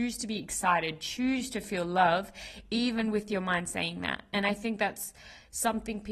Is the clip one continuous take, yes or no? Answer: yes